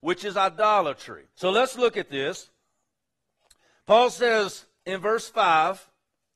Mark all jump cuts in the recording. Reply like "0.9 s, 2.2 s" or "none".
1.3 s